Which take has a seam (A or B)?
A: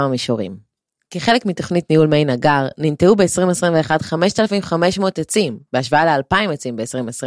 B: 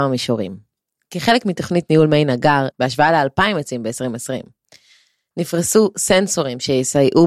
B